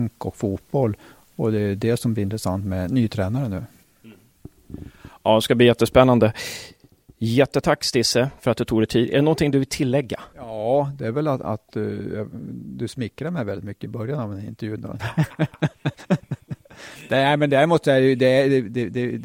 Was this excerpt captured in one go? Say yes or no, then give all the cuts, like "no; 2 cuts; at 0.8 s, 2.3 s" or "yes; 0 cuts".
no; 2 cuts; at 10.3 s, 15.0 s